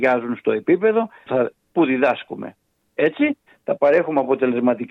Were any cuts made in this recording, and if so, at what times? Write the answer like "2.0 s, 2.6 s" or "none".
1.3 s